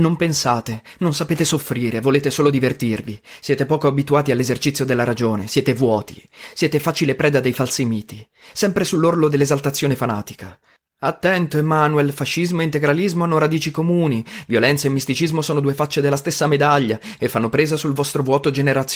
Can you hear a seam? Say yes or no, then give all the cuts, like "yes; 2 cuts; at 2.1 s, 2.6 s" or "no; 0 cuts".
no; 0 cuts